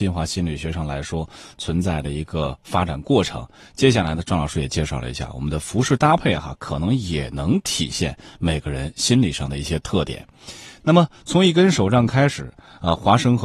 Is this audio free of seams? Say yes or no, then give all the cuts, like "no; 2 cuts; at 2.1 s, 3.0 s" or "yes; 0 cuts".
yes; 0 cuts